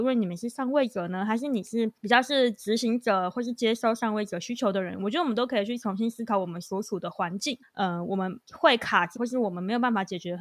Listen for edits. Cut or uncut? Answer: cut